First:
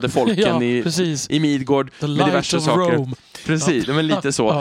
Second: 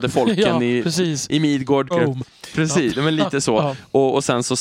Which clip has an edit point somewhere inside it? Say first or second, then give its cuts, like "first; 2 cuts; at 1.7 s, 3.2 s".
second; 1 cut; at 1.9 s